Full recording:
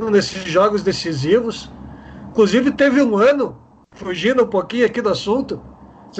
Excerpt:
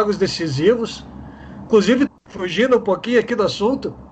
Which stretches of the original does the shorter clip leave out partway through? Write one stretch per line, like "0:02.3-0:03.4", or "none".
0:02.7-0:03.7